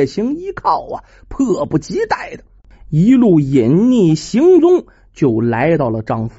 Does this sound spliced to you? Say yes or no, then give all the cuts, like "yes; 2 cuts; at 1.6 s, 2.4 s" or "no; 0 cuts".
no; 0 cuts